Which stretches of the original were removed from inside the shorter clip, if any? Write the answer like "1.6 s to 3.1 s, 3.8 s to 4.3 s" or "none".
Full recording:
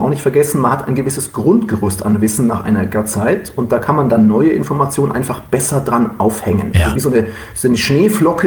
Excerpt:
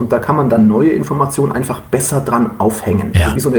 none